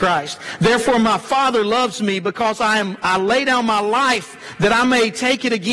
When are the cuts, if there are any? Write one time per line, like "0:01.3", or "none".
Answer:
none